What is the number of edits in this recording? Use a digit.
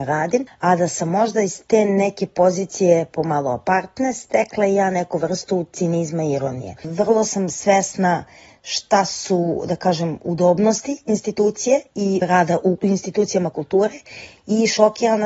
1